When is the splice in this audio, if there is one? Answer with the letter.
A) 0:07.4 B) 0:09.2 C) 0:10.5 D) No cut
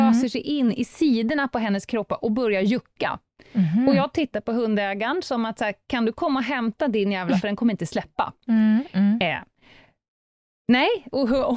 A